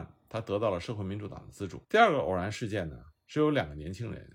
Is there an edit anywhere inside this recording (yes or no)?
yes